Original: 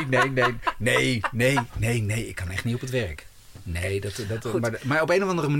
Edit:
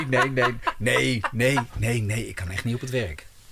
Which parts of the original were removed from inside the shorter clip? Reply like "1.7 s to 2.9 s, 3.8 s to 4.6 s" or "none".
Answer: none